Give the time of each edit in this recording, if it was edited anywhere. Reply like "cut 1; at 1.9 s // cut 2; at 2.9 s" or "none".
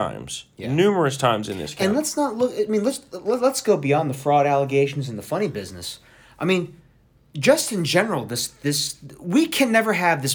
none